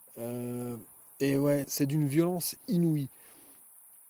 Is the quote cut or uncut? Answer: cut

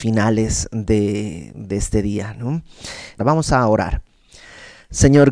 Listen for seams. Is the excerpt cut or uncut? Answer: cut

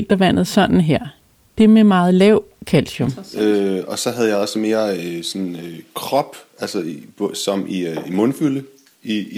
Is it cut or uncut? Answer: uncut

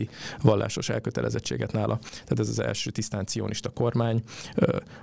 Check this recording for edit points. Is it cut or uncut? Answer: uncut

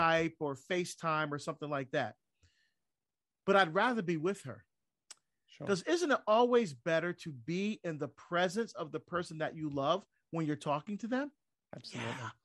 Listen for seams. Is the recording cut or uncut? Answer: uncut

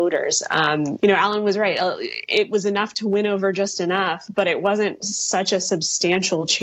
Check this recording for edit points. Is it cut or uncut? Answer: cut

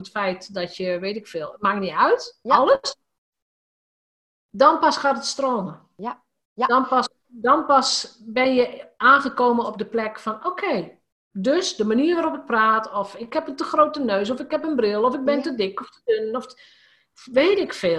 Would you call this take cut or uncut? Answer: uncut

